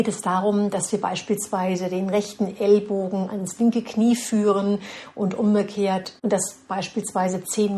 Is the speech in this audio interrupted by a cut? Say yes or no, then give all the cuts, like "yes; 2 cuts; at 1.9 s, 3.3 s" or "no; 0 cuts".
yes; 1 cut; at 6.2 s